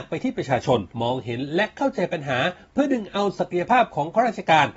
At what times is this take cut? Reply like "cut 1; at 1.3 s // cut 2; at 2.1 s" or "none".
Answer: cut 1; at 0.9 s